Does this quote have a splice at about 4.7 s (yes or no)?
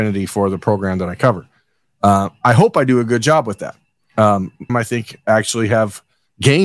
yes